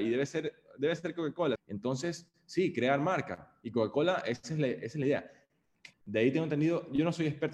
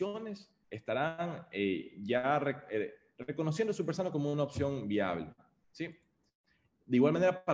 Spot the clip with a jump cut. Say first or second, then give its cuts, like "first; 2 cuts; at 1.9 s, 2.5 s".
first; 2 cuts; at 1.6 s, 5.9 s